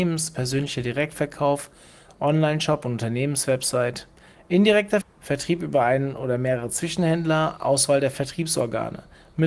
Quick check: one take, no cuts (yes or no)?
no